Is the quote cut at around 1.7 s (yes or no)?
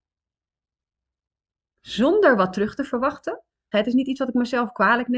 no